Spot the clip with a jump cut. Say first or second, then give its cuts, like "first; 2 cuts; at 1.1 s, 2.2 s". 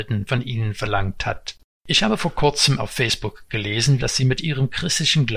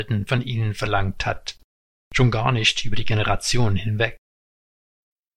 first; 2 cuts; at 1.8 s, 4.0 s